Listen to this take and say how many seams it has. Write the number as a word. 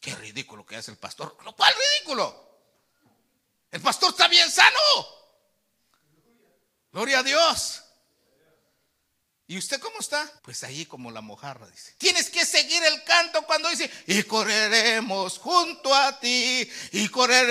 three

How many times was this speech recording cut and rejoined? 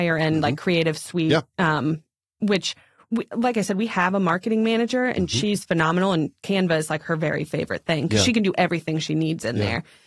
zero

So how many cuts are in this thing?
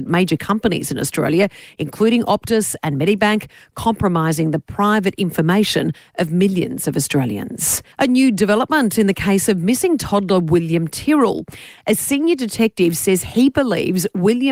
one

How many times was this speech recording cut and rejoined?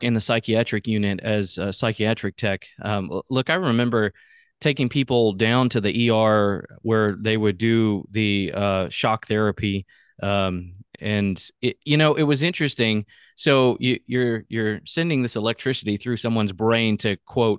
zero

